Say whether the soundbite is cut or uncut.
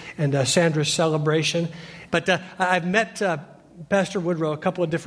cut